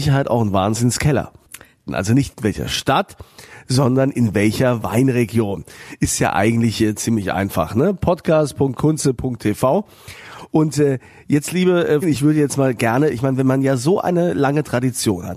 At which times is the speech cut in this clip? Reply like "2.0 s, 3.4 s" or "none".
1.9 s, 12.0 s